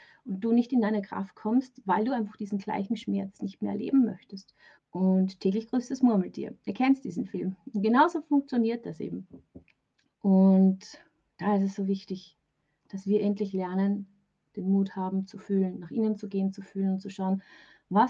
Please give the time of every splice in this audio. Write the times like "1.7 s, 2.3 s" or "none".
4.8 s